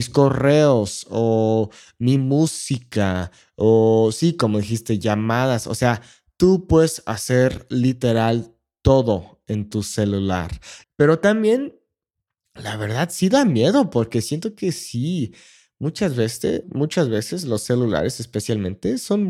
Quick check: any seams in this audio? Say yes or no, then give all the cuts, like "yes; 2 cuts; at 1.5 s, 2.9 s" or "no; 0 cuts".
yes; 2 cuts; at 10.8 s, 16.6 s